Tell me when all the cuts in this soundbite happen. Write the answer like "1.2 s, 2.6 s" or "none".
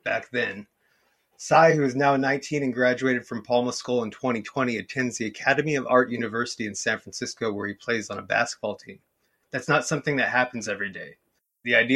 9.4 s